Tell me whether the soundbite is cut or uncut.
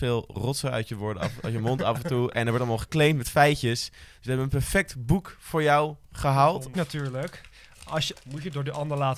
cut